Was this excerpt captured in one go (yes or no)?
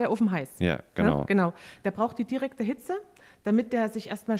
yes